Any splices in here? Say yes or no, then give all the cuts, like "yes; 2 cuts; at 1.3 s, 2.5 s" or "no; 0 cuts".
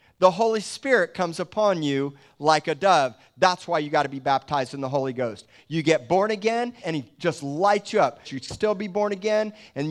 yes; 2 cuts; at 6.8 s, 8.2 s